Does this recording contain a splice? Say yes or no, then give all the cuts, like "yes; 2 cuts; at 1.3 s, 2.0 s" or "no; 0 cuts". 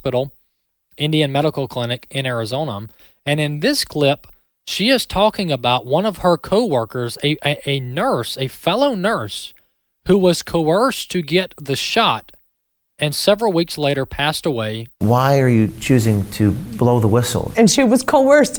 yes; 2 cuts; at 14.9 s, 17.5 s